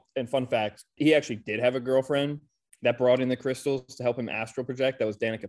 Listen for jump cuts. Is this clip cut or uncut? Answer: cut